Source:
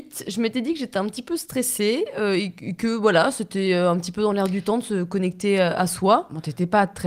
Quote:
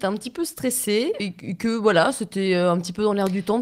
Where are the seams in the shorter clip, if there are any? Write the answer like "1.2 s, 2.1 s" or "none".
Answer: 1.2 s